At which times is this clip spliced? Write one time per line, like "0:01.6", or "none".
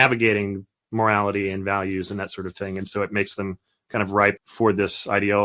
0:04.4